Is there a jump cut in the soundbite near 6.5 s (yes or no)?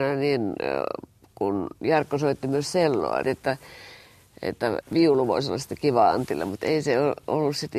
no